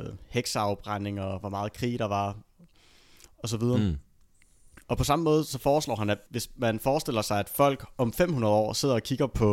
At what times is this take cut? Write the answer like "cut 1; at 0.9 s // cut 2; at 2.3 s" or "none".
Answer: none